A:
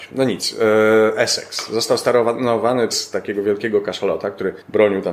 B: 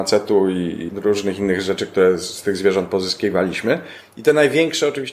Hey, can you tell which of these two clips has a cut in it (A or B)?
A